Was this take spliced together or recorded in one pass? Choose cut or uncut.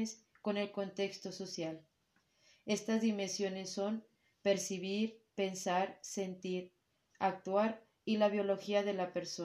uncut